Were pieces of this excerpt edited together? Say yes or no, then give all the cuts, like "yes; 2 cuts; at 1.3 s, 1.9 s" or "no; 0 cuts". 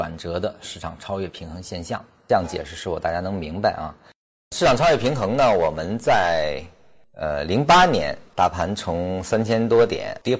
no; 0 cuts